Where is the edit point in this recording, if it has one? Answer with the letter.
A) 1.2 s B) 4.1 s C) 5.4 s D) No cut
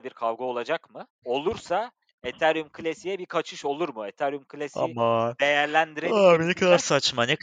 A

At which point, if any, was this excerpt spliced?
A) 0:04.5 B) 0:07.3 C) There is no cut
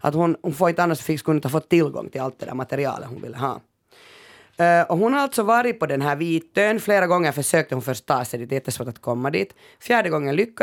C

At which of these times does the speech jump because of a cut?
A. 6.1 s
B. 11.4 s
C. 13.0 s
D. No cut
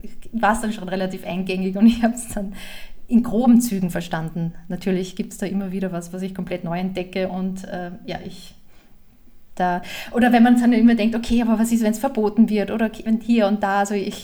C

